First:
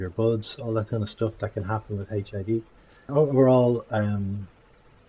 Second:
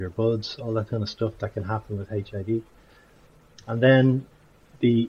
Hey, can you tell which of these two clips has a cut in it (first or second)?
first